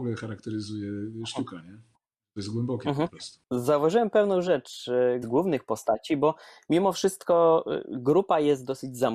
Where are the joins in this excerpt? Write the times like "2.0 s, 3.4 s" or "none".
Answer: 5.2 s